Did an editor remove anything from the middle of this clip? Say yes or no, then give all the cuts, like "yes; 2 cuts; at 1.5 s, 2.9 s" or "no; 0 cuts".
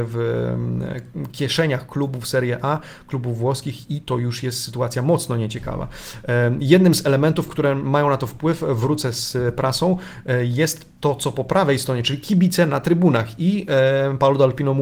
no; 0 cuts